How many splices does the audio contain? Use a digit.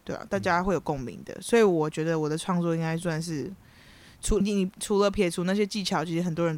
1